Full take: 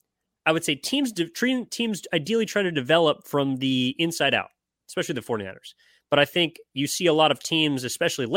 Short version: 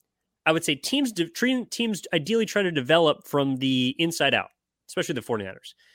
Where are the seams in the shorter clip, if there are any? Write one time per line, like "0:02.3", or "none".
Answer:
none